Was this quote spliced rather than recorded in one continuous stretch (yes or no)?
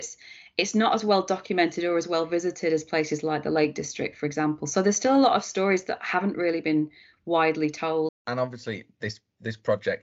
yes